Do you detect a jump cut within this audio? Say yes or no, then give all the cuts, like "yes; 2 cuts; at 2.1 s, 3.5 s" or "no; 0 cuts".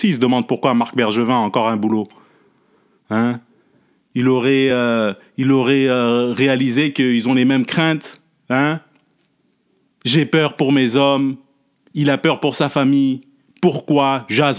no; 0 cuts